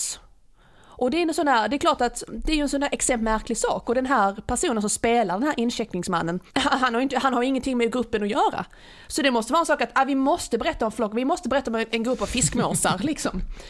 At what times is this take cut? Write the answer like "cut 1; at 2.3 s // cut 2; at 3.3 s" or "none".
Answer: cut 1; at 6.5 s